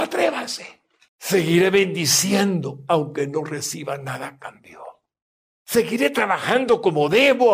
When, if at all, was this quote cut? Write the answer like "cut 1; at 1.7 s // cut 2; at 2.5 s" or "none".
cut 1; at 1.1 s